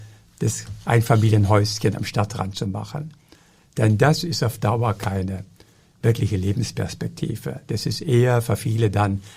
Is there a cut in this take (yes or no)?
no